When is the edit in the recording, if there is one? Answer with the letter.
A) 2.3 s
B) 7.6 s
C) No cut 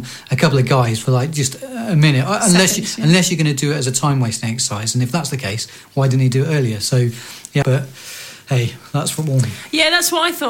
B